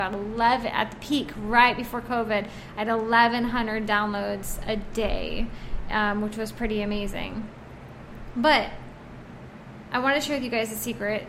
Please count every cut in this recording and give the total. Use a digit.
0